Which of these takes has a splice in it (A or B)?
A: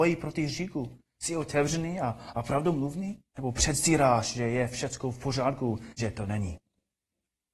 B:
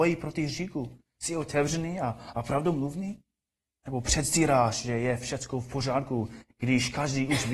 A